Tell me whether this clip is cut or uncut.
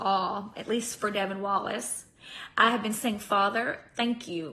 uncut